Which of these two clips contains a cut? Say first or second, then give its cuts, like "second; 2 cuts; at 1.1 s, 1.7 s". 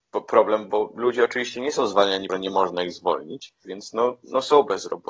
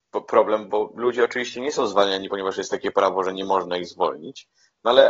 first; 2 cuts; at 2.3 s, 3.6 s